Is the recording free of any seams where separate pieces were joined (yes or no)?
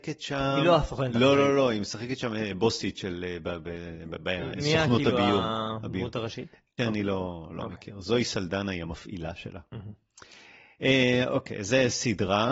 no